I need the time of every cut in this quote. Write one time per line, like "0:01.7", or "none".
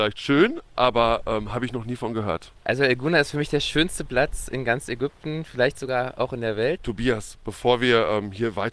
0:02.6
0:06.8

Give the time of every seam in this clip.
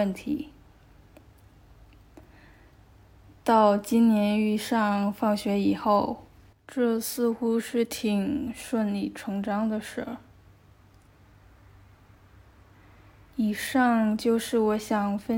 0:06.5

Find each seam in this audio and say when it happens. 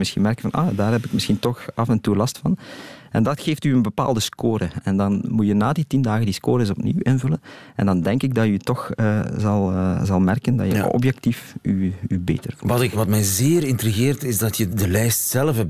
0:12.9
0:14.7

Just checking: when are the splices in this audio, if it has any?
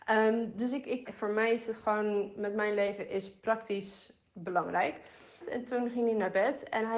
0:01.1
0:05.4

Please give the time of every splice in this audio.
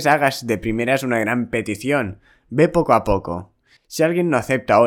0:03.8

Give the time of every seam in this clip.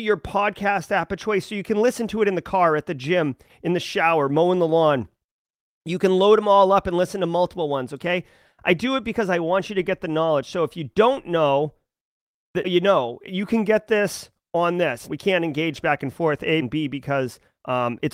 0:12.6
0:15.1
0:16.6

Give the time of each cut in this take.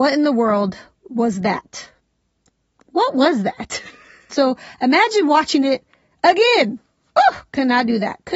0:04.3

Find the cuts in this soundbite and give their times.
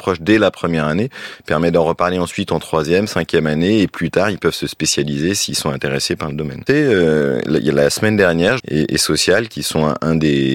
0:06.7
0:08.6

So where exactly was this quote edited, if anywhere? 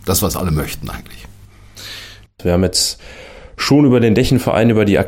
0:02.3

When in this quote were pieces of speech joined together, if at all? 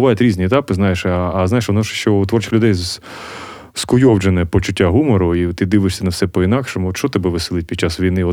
none

